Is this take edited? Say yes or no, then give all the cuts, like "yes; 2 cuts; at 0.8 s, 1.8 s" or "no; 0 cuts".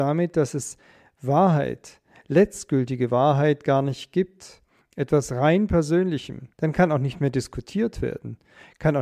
yes; 3 cuts; at 2.2 s, 4.8 s, 6.5 s